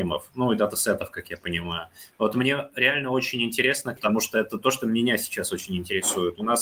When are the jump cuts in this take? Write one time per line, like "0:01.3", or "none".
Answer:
0:04.0

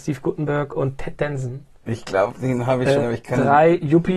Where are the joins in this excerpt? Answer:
0:03.0

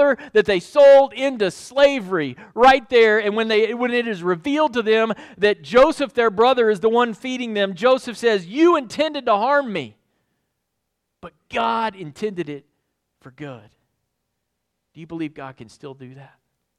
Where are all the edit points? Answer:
none

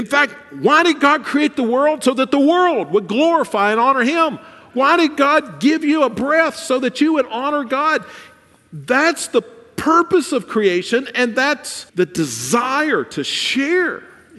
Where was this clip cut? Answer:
0:04.7
0:11.9

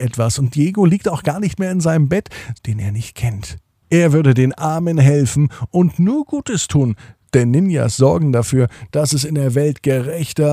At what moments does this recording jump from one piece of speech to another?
0:02.5
0:03.8

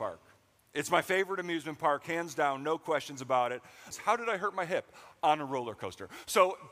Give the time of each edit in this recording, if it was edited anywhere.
0:03.9

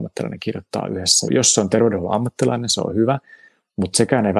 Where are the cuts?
0:01.3

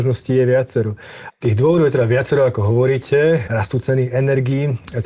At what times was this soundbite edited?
0:01.3
0:03.5

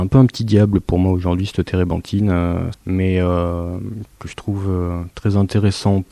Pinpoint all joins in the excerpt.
0:02.7
0:04.1

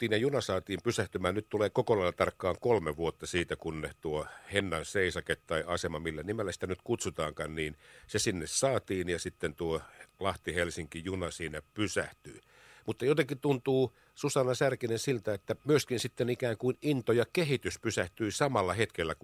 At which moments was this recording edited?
0:15.6

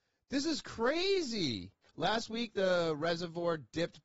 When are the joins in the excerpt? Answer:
0:01.8

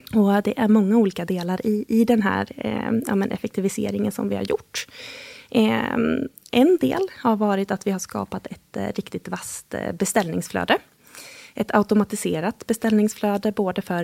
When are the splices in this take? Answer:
none

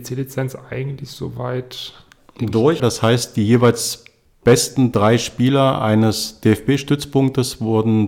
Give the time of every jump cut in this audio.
0:02.8

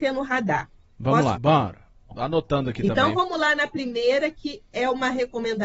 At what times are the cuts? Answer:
0:01.4

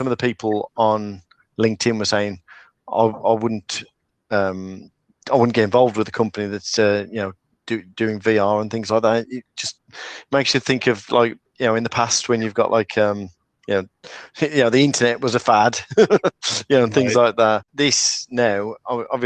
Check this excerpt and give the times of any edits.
none

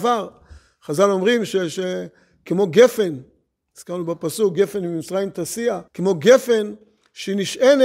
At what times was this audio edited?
0:05.9

